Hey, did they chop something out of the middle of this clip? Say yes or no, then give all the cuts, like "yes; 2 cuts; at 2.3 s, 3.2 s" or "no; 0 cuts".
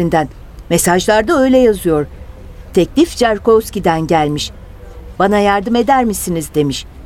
yes; 1 cut; at 5.2 s